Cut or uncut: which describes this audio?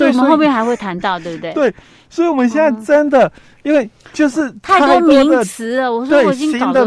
uncut